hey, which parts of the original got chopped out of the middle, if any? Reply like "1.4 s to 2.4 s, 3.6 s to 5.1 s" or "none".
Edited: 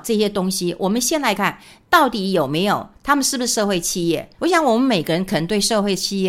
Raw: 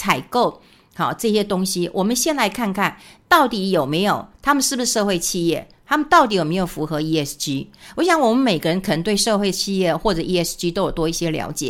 2.5 s to 2.7 s, 5.8 s to 7.9 s